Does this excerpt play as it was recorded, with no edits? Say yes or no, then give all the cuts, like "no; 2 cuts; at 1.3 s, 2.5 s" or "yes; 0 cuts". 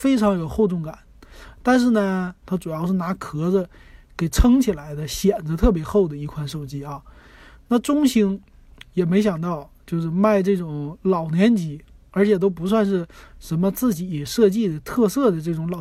no; 1 cut; at 2.4 s